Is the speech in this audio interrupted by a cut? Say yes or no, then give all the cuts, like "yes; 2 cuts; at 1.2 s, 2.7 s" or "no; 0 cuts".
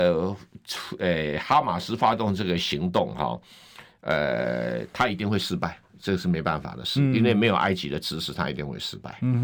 no; 0 cuts